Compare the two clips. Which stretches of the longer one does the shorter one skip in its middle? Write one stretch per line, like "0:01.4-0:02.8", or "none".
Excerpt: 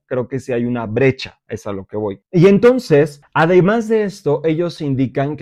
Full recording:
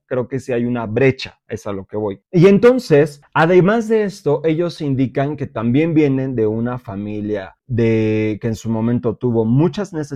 none